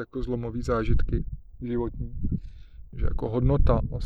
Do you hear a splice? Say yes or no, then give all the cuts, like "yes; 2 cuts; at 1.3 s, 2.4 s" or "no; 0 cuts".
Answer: yes; 1 cut; at 2.9 s